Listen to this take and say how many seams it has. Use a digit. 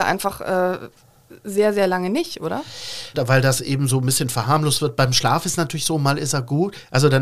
1